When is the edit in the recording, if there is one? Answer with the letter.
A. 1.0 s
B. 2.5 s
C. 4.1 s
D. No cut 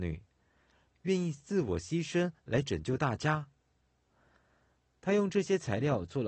C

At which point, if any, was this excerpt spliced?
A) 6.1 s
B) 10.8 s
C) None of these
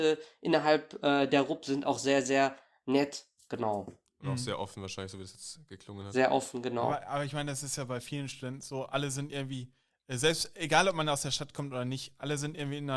C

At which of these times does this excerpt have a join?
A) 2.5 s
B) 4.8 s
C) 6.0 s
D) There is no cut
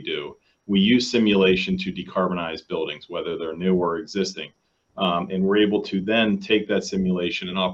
D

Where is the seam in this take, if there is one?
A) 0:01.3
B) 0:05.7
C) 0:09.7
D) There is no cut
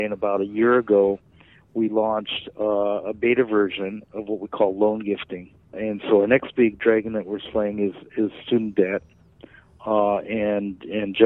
B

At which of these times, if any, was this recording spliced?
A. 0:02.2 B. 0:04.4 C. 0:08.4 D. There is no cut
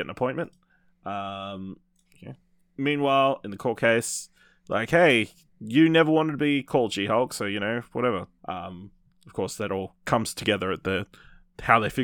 C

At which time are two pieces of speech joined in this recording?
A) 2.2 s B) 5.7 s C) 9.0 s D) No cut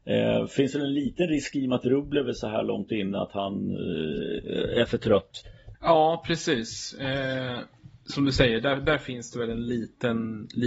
B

